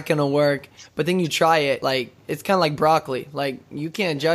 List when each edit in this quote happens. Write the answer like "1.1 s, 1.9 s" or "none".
none